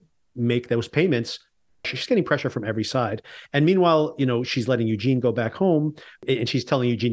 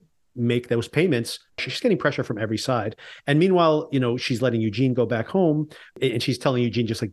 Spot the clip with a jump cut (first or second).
second